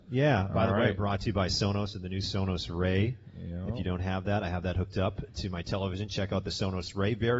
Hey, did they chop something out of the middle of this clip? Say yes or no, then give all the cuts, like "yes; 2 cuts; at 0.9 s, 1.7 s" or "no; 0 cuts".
no; 0 cuts